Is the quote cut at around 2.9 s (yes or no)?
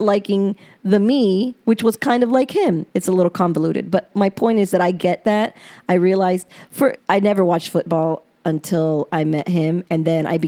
yes